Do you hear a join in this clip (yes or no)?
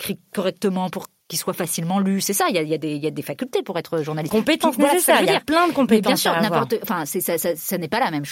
yes